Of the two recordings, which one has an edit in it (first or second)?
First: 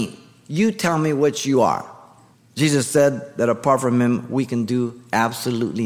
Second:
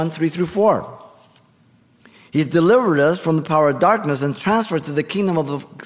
first